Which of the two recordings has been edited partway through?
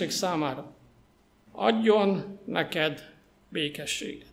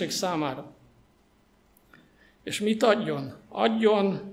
first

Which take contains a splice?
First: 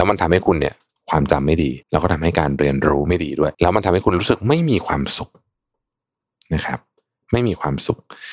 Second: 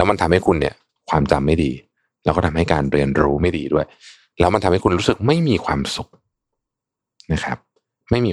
first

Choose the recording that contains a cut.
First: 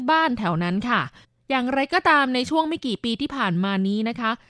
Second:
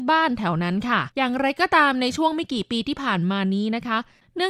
second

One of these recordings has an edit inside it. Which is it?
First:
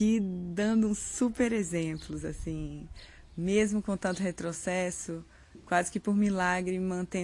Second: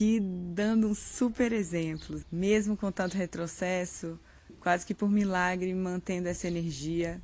second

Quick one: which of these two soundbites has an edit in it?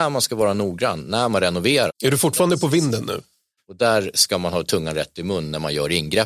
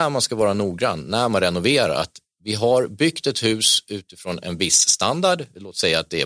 first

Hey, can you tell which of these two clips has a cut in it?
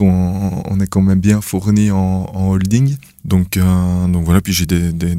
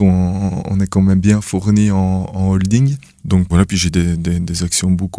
second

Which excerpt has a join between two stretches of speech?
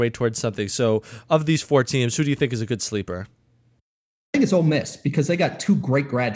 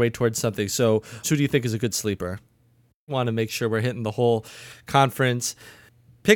second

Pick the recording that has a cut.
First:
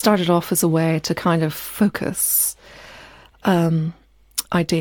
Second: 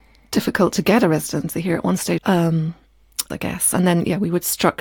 second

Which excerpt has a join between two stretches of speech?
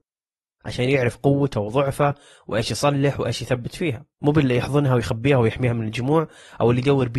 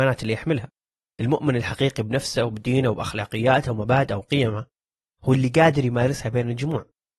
first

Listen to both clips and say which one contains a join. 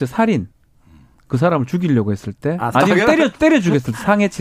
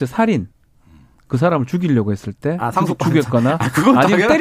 first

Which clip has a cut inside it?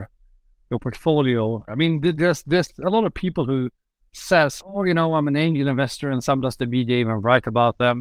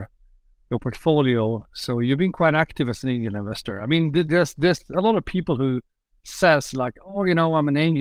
first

